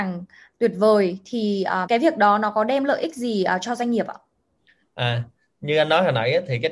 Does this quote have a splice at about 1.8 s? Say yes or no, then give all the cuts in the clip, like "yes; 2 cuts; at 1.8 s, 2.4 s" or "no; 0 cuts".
yes; 1 cut; at 1.8 s